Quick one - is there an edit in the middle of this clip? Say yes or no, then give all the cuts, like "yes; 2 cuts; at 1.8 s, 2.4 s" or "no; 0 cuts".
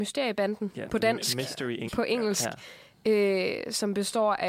yes; 1 cut; at 1.9 s